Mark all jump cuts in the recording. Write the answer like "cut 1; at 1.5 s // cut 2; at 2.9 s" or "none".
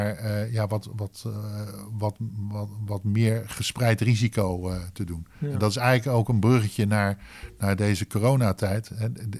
none